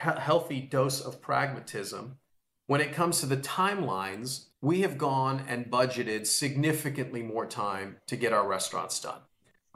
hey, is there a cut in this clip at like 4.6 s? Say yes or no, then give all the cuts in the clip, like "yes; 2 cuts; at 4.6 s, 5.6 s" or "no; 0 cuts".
yes; 1 cut; at 4.6 s